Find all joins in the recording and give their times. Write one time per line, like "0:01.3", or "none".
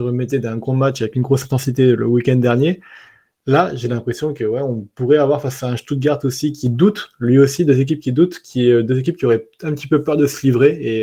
none